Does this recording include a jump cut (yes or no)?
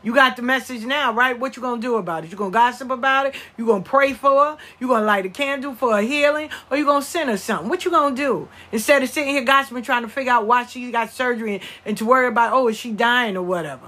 no